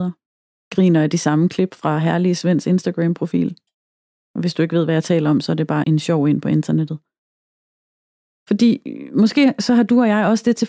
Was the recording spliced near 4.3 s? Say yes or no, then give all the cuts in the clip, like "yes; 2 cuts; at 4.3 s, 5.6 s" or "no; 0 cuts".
no; 2 cuts; at 5.8 s, 8.3 s